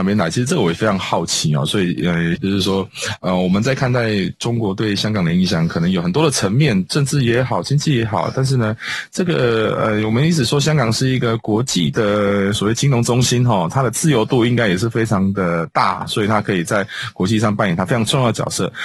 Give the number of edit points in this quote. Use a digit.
1